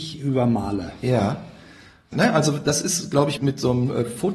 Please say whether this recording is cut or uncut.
cut